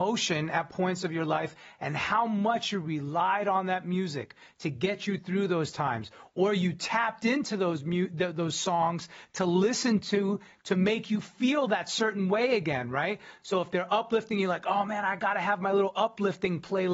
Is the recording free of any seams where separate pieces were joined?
yes; 0 cuts

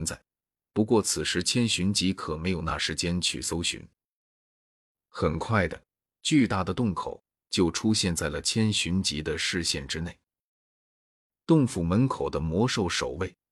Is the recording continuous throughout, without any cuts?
yes; 0 cuts

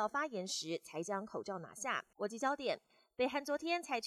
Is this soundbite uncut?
no; 1 cut; at 2.1 s

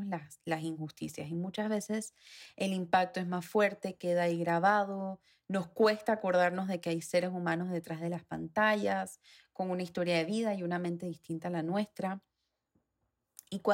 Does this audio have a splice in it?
no; 0 cuts

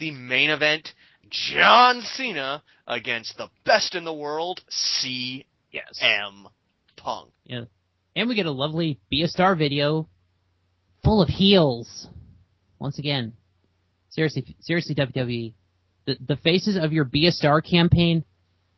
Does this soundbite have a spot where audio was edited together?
yes; 1 cut; at 7.3 s

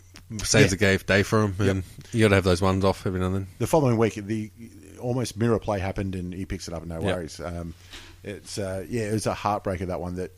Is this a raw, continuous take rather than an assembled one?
yes; 0 cuts

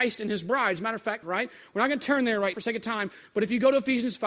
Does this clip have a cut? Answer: yes; 2 cuts; at 1.2 s, 2.5 s

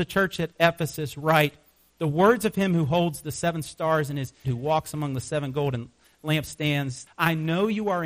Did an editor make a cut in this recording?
yes; 2 cuts; at 4.4 s, 7.1 s

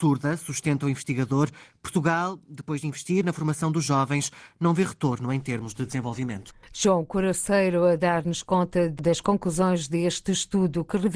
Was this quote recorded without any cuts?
yes; 0 cuts

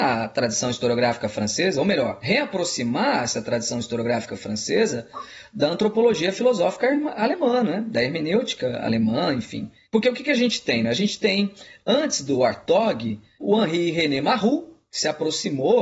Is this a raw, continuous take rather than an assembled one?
yes; 0 cuts

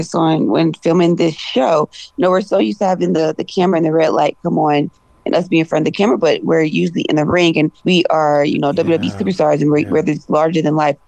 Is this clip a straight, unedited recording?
no; 1 cut; at 7.8 s

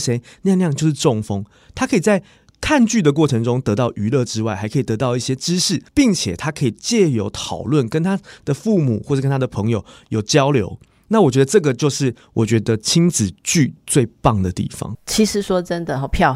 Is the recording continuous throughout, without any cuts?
no; 1 cut; at 5.9 s

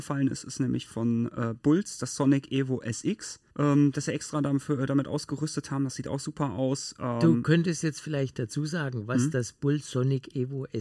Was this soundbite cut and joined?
yes; 1 cut; at 3.5 s

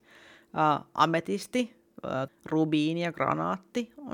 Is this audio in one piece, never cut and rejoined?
no; 1 cut; at 2.3 s

